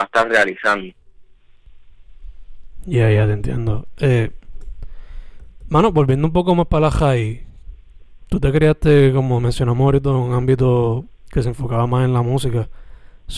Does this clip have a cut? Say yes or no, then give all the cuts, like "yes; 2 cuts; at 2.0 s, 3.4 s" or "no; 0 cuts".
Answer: no; 0 cuts